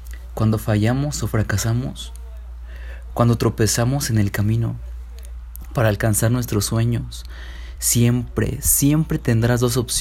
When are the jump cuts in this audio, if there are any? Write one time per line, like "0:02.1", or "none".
none